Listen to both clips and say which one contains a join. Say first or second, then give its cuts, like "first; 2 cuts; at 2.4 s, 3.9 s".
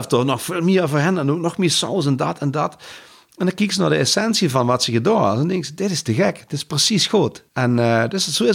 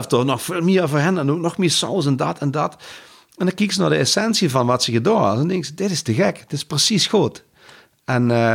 first; 1 cut; at 7.5 s